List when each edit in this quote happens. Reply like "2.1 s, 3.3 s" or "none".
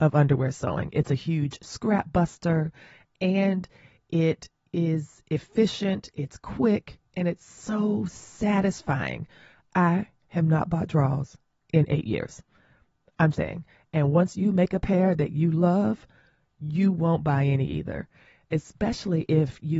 13.3 s